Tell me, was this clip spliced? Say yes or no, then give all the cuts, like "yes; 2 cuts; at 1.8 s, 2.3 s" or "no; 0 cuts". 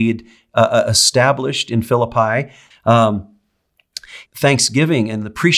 yes; 2 cuts; at 2.7 s, 4.3 s